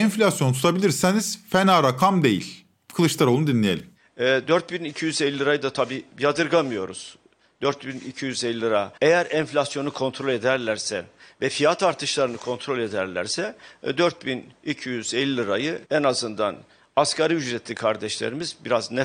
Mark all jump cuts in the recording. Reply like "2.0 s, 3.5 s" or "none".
9.0 s, 15.8 s